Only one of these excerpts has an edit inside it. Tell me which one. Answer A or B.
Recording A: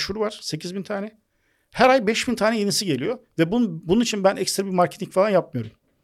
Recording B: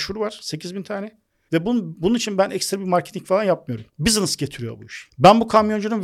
B